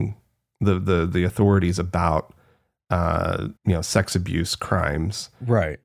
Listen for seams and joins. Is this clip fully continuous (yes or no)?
no